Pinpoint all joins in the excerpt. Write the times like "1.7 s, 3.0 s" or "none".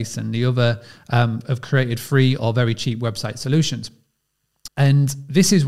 1.4 s, 4.7 s